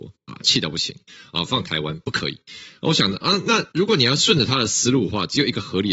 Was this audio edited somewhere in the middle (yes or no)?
no